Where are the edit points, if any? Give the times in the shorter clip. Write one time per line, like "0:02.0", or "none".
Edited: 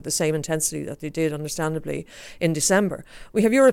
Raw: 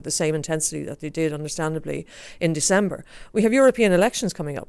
none